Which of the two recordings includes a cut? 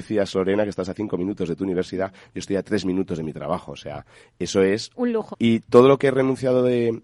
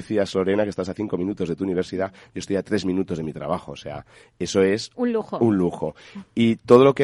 first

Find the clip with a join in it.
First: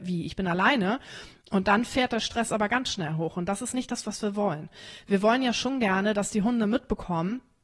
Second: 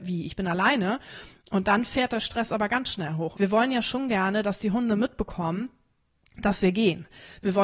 second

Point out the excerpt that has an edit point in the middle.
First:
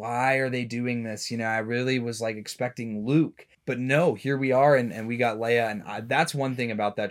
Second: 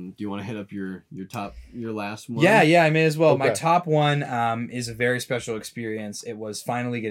first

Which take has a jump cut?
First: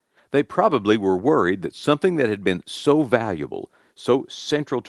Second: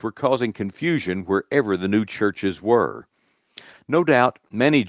second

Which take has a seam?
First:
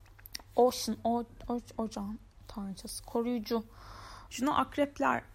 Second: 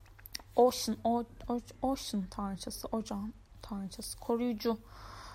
first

